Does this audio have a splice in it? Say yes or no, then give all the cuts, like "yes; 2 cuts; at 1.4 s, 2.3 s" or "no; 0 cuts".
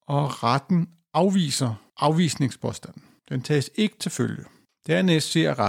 no; 0 cuts